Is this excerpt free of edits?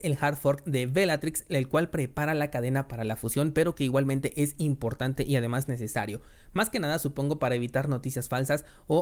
yes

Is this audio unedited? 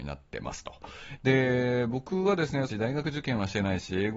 no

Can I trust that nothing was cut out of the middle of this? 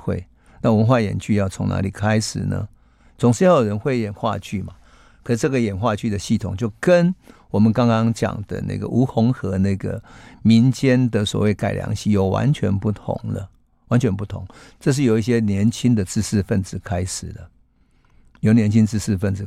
yes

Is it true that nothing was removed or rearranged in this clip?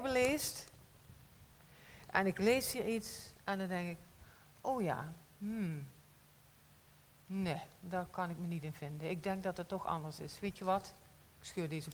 yes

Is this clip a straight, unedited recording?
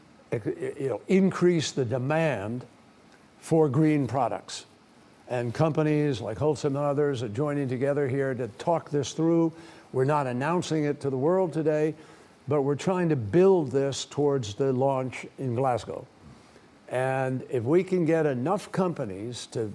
yes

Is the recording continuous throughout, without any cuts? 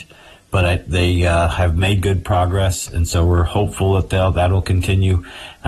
yes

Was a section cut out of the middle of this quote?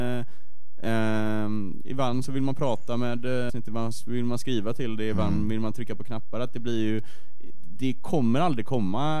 yes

